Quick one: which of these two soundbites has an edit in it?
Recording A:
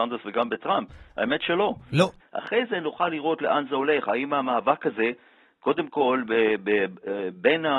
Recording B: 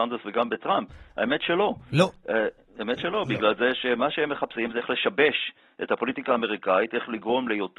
A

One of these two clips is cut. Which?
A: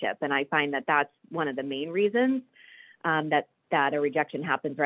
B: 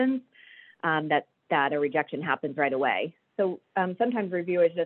B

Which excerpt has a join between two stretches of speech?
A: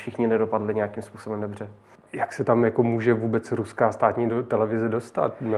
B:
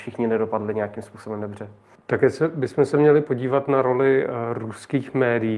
A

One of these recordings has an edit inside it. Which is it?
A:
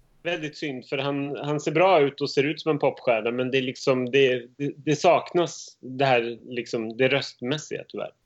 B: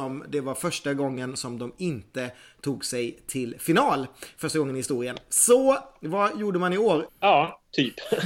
B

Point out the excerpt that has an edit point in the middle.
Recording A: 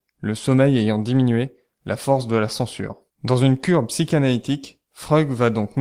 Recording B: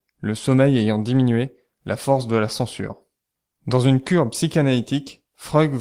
A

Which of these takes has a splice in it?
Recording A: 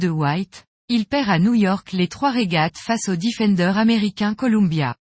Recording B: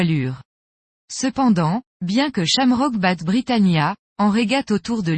B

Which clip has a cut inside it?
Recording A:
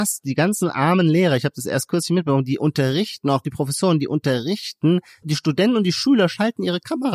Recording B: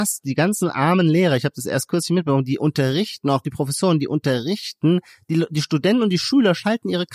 A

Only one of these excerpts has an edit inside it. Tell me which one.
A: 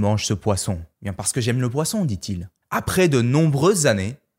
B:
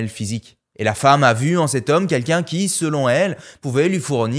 A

